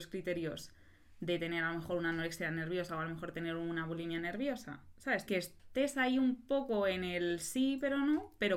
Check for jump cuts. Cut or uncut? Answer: cut